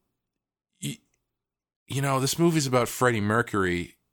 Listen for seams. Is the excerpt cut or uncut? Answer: cut